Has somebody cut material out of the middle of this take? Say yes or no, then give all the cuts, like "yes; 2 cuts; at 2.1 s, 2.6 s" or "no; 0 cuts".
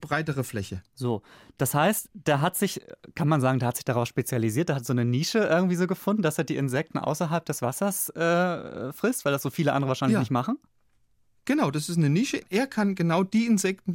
no; 0 cuts